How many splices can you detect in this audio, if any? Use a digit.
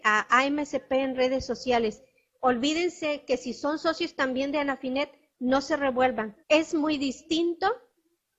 1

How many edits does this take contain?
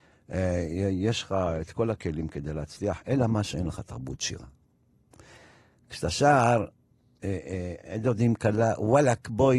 0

